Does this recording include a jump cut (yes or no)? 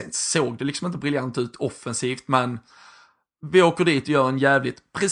no